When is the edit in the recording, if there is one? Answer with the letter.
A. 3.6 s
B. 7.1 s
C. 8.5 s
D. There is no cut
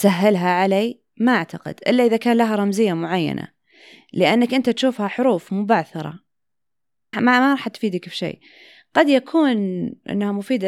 B